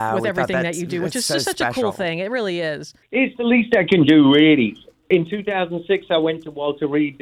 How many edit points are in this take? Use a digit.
0